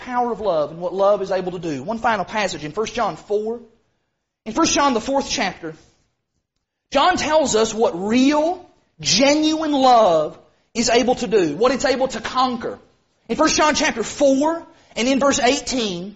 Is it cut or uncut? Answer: uncut